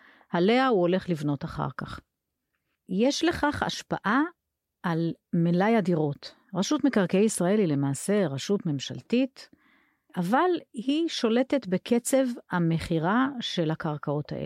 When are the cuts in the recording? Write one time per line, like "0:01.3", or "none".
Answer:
none